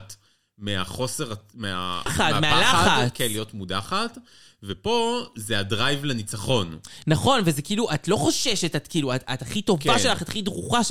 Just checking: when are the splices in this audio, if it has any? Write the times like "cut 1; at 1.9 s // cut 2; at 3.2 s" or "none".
cut 1; at 2.1 s